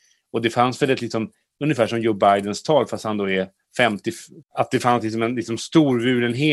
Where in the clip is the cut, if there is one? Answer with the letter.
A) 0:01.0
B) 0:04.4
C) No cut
B